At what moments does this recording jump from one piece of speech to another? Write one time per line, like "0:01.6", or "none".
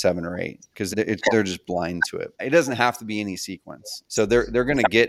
0:00.9
0:02.3
0:04.0